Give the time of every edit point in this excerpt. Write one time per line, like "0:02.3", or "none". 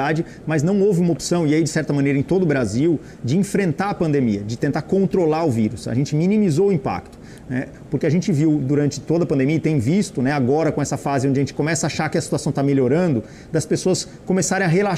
0:07.9